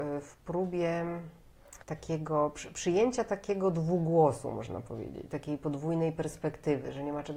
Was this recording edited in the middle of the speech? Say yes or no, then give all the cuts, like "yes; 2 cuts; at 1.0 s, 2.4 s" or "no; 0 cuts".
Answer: yes; 2 cuts; at 1.8 s, 5.3 s